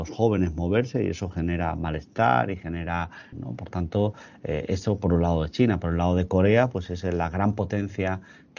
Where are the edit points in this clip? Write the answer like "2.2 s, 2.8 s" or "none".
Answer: 3.3 s